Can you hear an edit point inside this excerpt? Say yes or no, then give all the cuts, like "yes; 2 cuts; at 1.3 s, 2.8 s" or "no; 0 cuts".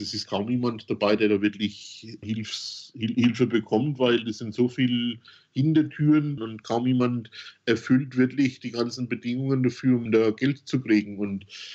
yes; 3 cuts; at 2.2 s, 6.4 s, 10.1 s